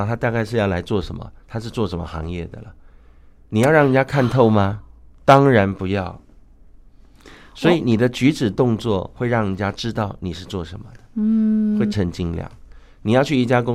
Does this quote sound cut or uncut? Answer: cut